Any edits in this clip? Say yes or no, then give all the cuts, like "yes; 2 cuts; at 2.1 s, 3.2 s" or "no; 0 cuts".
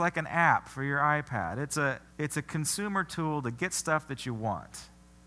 yes; 1 cut; at 2.1 s